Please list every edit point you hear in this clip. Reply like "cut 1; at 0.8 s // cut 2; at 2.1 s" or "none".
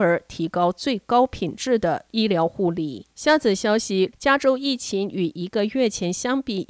cut 1; at 3.1 s // cut 2; at 4.1 s